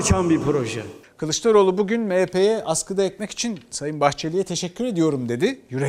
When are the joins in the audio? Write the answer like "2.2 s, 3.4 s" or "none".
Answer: 1.0 s